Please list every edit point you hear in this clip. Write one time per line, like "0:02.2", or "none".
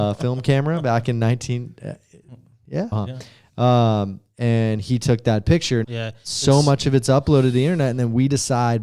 0:02.9
0:05.8